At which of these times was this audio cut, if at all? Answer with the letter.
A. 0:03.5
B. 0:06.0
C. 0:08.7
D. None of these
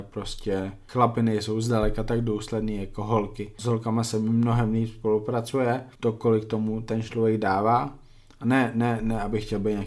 B